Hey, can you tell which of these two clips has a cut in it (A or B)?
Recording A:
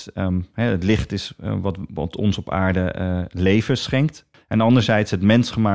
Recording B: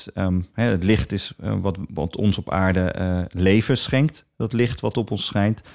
A